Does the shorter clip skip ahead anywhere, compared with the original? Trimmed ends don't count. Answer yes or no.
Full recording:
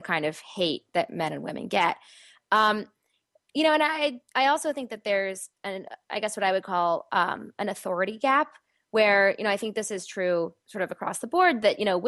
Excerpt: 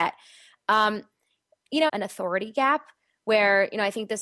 yes